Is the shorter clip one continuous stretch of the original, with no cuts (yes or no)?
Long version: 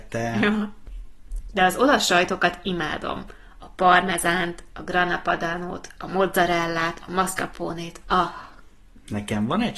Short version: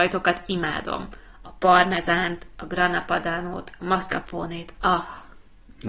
no